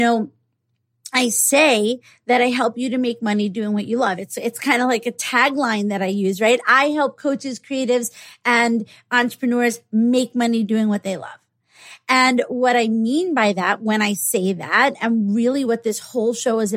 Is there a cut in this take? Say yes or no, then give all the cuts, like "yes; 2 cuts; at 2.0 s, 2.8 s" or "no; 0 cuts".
no; 0 cuts